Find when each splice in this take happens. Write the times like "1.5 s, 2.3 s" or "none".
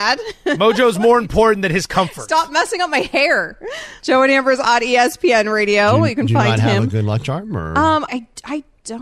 4.0 s, 8.1 s